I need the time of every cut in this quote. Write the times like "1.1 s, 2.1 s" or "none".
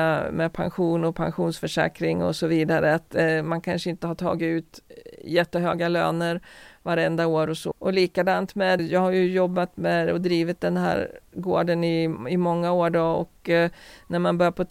7.7 s, 8.8 s